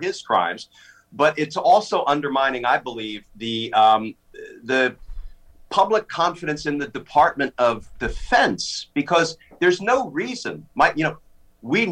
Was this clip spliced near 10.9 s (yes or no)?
no